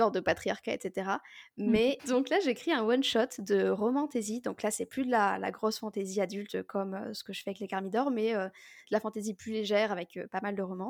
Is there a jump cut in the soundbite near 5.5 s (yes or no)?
no